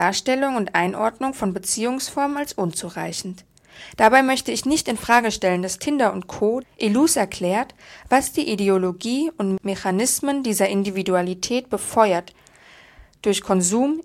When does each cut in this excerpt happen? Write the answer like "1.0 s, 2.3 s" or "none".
6.6 s